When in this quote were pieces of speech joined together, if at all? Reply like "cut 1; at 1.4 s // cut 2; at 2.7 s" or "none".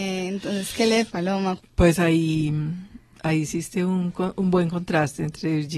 cut 1; at 1.6 s